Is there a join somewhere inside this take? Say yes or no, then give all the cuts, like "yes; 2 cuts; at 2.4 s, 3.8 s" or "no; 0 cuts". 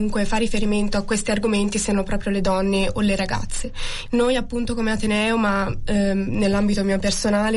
yes; 1 cut; at 4.1 s